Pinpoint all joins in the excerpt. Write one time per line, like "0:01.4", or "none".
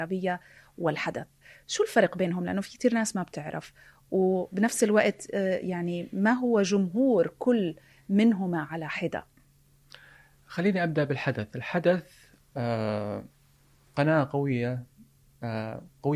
none